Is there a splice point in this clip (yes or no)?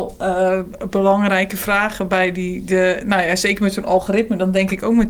no